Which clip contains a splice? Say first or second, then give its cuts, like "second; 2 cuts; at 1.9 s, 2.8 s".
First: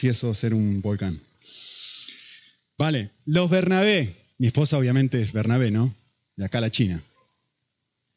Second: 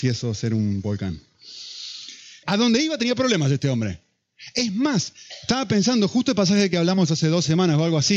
second; 1 cut; at 2.4 s